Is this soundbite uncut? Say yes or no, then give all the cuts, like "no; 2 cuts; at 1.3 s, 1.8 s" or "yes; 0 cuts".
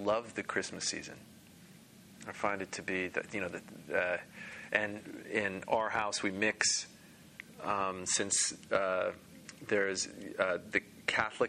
yes; 0 cuts